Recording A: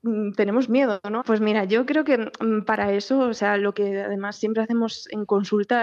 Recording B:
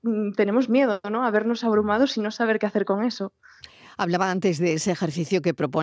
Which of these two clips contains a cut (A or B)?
A